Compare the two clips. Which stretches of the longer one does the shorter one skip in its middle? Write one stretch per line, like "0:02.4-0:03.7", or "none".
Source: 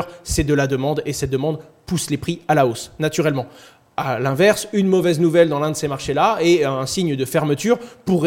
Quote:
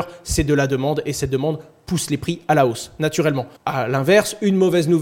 0:03.6-0:03.9